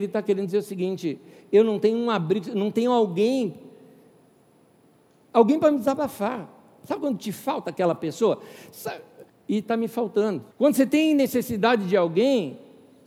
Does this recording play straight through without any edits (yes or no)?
no